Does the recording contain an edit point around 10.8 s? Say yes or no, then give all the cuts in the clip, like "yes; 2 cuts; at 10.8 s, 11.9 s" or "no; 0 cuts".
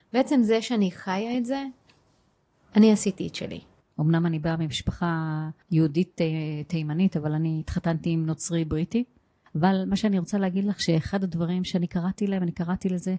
no; 3 cuts; at 3.8 s, 5.6 s, 9.5 s